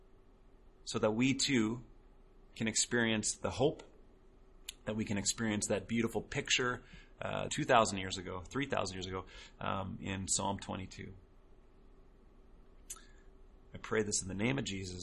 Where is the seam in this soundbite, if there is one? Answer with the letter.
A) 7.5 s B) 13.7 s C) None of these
A